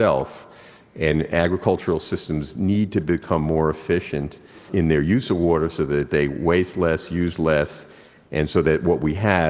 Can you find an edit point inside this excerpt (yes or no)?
yes